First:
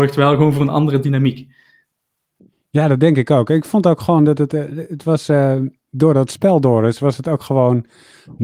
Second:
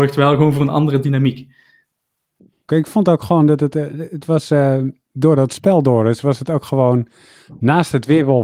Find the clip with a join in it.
second; 1 cut; at 2.7 s

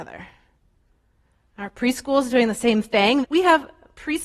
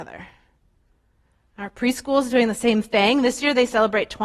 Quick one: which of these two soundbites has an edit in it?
first; 1 cut; at 3.2 s

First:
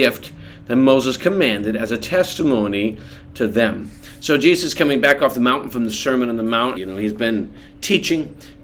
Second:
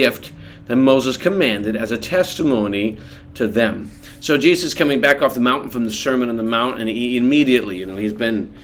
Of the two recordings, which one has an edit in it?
first; 1 cut; at 6.8 s

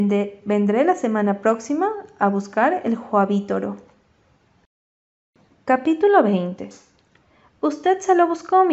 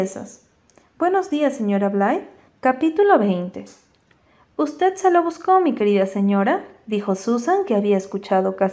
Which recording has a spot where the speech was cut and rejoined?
second; 1 cut; at 2.5 s

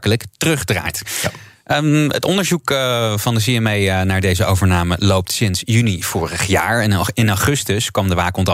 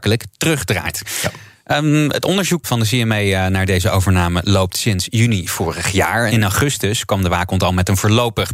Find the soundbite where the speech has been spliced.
second; 2 cuts; at 2.6 s, 6.3 s

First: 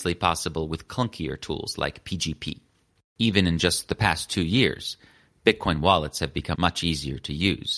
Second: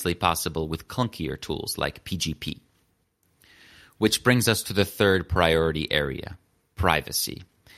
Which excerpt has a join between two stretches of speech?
first; 2 cuts; at 3.0 s, 6.5 s

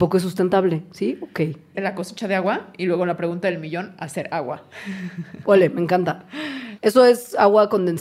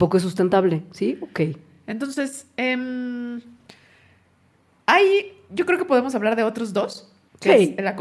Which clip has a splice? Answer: first; 2 cuts; at 1.7 s, 6.8 s

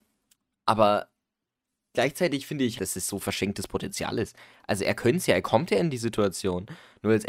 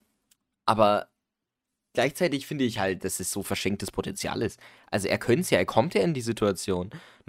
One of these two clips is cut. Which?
first; 1 cut; at 2.8 s

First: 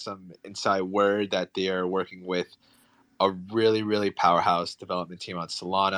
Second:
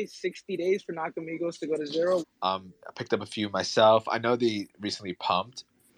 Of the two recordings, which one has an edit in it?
second; 1 cut; at 2.2 s

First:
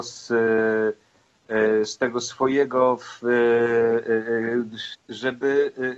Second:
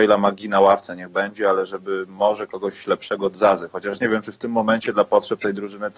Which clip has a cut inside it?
first; 1 cut; at 4.9 s

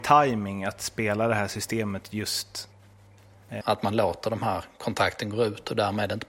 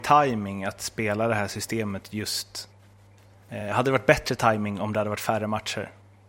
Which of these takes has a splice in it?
first; 1 cut; at 3.6 s

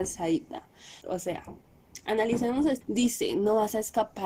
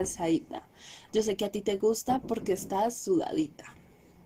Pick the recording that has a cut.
first; 2 cuts; at 1.0 s, 2.8 s

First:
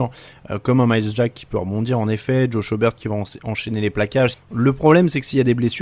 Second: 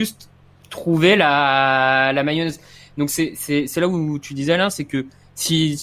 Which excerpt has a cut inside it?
first; 1 cut; at 4.3 s

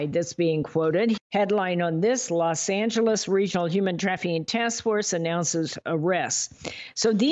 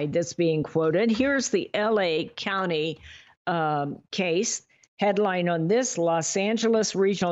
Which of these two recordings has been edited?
first; 1 cut; at 1.2 s

